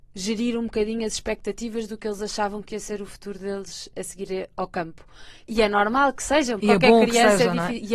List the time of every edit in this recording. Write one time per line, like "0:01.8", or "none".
0:05.5
0:06.6